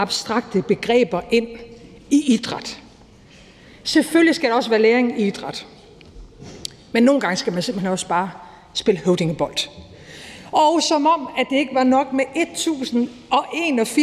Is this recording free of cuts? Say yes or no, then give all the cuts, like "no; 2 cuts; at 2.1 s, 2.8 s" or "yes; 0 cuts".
yes; 0 cuts